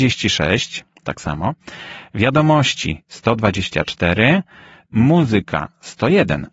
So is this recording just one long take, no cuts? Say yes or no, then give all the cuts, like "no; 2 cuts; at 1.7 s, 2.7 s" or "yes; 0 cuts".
no; 1 cut; at 4.9 s